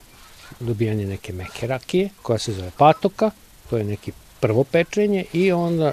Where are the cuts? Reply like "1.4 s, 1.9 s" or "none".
2.2 s